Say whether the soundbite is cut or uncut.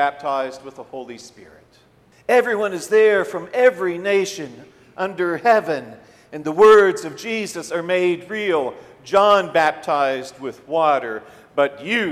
cut